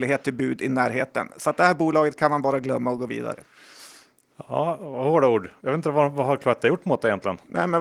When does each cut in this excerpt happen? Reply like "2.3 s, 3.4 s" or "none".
none

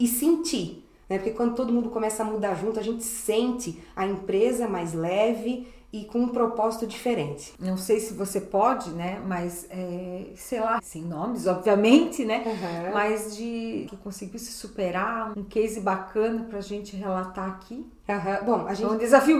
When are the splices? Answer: 10.8 s, 13.9 s, 15.3 s

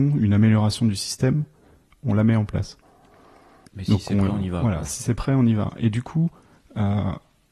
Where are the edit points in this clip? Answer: 3.7 s

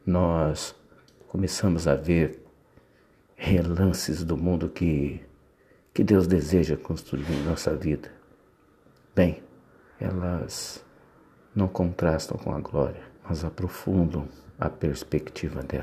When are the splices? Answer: 9.9 s, 13.2 s

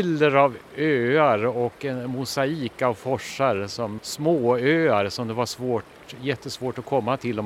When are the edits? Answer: 4.0 s

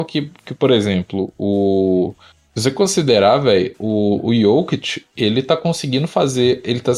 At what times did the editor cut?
none

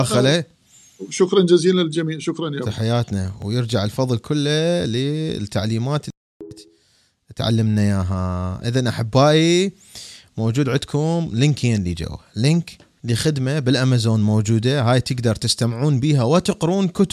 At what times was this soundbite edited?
13.0 s

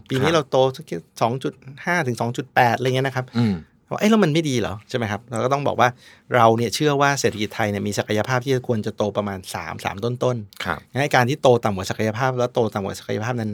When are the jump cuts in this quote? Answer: none

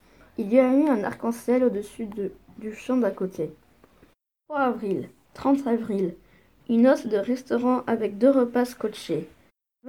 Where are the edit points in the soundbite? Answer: 5.2 s

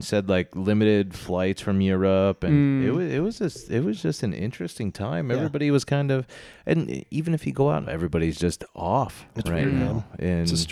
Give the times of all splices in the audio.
7.8 s

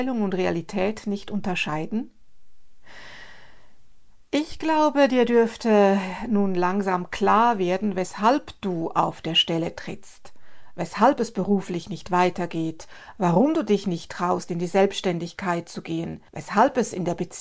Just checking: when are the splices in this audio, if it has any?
16.3 s

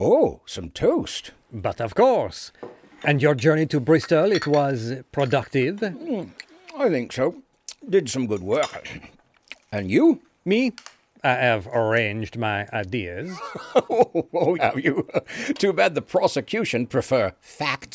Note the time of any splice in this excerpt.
14.6 s

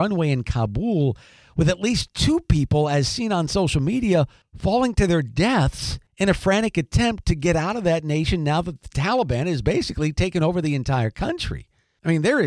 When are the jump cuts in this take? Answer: none

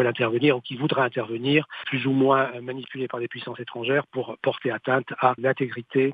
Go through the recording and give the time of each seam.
none

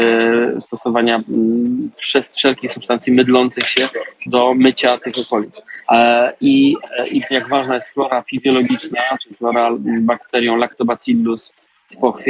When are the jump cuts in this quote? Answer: 4.3 s, 5.8 s, 7.3 s

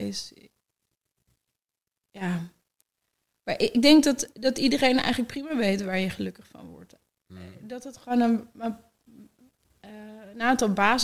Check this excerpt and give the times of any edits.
none

